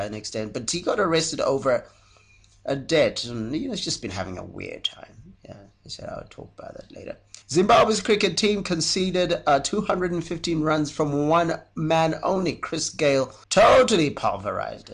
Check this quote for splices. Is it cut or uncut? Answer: cut